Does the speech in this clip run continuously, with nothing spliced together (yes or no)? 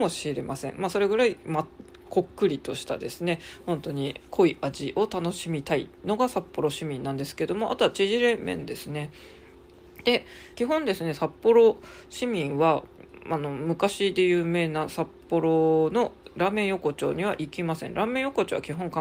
no